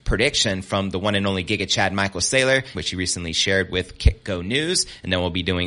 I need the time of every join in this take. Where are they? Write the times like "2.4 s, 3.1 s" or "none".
2.7 s